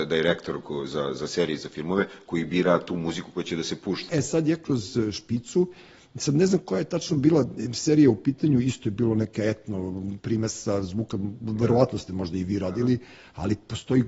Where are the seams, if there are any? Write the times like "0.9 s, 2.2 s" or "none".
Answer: 4.1 s